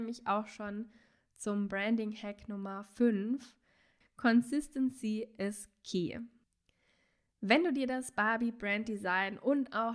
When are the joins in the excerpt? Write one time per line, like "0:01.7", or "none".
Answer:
0:04.0